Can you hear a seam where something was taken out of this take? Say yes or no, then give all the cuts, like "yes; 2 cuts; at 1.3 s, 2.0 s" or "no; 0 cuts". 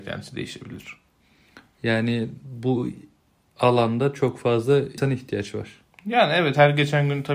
no; 0 cuts